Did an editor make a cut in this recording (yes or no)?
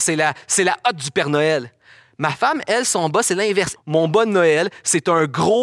yes